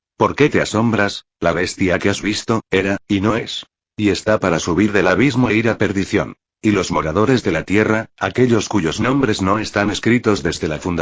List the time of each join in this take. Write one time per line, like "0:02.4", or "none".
0:01.4